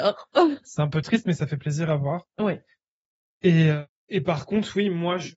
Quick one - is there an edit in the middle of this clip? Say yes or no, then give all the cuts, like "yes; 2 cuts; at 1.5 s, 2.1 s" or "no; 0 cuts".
no; 0 cuts